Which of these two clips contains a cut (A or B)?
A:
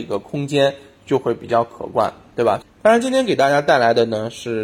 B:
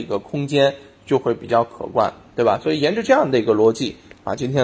A